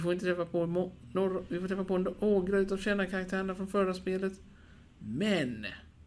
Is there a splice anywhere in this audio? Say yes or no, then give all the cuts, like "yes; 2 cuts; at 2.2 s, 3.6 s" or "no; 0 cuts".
no; 0 cuts